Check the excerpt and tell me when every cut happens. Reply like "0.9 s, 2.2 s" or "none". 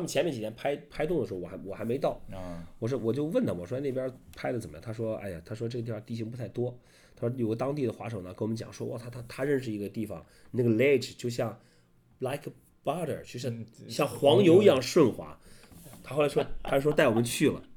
none